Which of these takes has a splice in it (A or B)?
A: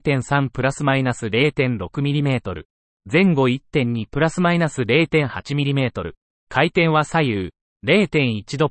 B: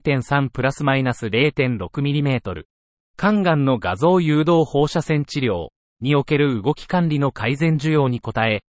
B